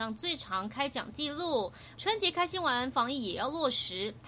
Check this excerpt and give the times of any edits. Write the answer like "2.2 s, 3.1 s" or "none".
2.0 s